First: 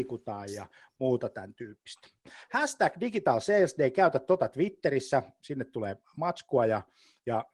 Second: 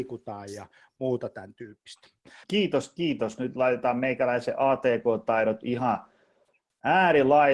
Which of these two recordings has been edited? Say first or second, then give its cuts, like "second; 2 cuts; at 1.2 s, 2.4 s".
second; 1 cut; at 2.4 s